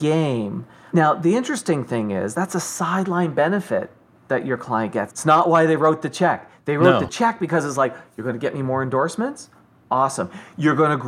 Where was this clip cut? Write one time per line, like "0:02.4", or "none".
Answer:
0:05.1